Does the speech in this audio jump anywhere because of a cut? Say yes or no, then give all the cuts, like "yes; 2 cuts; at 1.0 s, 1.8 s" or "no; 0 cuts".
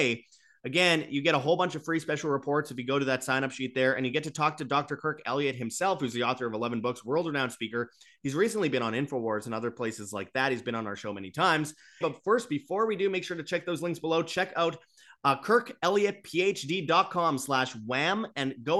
yes; 1 cut; at 12.0 s